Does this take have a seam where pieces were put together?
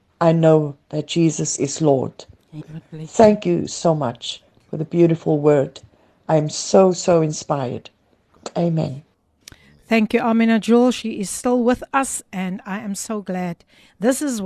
yes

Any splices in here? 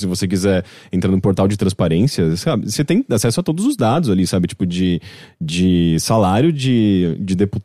no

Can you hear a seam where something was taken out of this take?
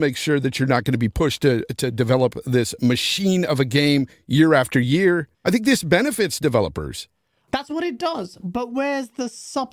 yes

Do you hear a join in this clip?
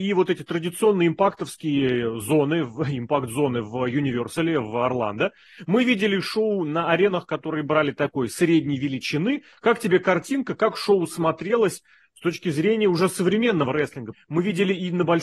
yes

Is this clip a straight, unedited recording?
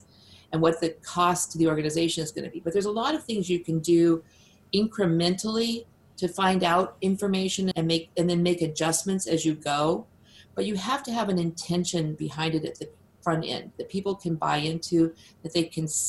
no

